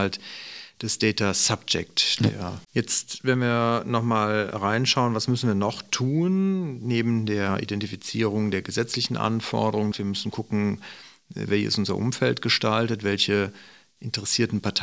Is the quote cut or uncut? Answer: cut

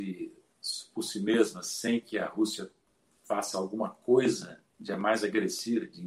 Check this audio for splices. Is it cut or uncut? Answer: uncut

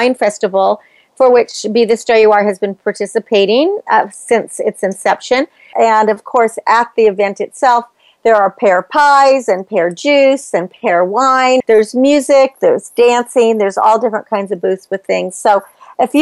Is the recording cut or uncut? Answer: cut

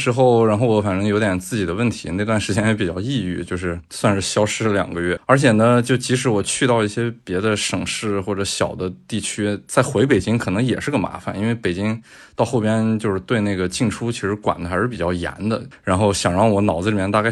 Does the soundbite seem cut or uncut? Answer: cut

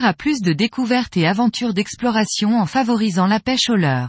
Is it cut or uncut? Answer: uncut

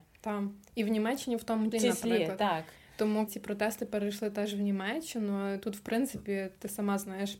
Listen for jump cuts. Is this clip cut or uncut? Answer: cut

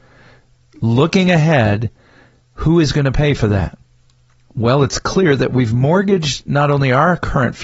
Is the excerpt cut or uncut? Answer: uncut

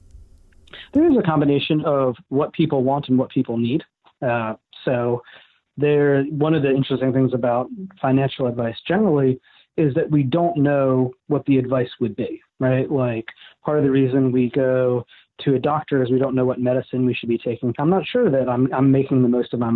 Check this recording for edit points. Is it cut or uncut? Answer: cut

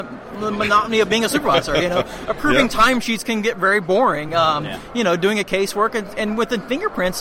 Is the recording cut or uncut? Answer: uncut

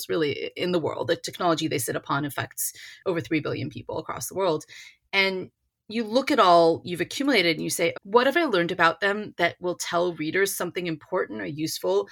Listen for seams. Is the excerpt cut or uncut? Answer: cut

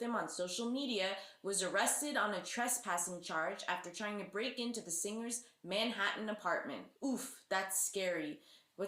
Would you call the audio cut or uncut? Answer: cut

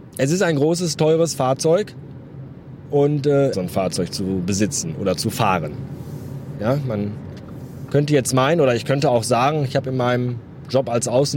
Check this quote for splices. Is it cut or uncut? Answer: cut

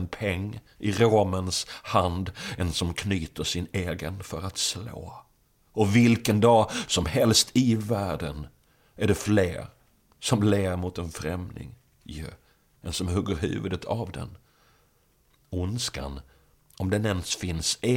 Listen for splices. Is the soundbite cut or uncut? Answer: uncut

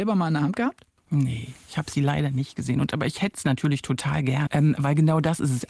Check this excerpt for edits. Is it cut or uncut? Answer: cut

